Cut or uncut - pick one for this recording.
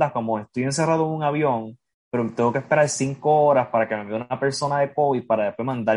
uncut